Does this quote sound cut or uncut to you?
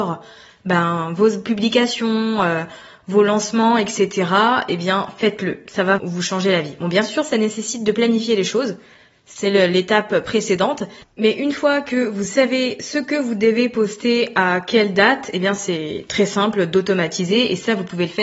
cut